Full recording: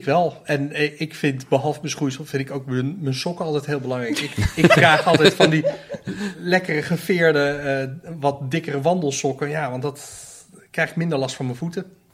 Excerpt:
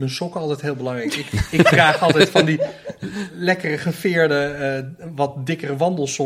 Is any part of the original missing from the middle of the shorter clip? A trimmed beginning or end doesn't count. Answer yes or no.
no